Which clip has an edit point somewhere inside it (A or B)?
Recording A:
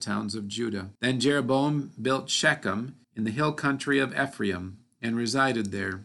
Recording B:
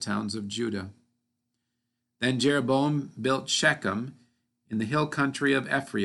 A